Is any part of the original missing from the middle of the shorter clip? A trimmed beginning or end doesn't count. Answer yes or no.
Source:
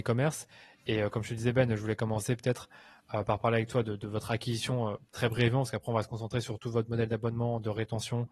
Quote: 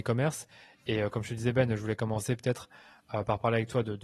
no